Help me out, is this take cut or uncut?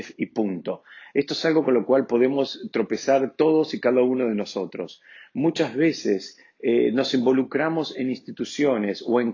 uncut